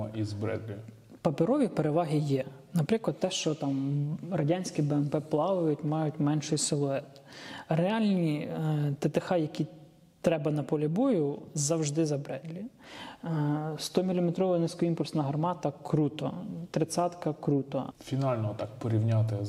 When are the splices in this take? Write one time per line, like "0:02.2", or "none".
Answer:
0:17.9